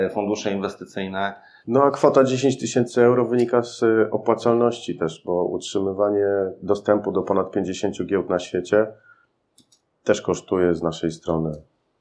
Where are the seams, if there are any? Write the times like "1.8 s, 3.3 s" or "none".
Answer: 1.6 s